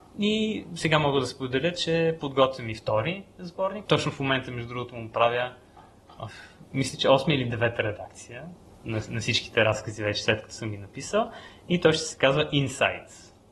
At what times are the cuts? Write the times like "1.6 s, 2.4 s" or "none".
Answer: 3.8 s

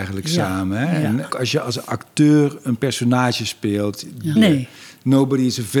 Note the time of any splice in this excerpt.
1.3 s, 4.4 s

